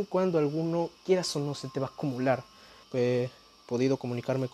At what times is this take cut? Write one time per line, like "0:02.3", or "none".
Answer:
0:02.8